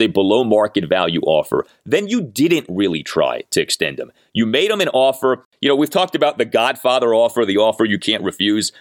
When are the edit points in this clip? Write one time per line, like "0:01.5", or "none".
none